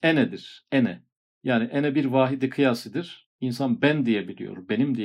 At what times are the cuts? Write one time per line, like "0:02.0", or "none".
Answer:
none